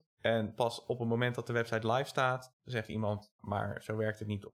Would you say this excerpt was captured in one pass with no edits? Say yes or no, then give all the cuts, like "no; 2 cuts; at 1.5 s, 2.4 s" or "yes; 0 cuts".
no; 1 cut; at 3.4 s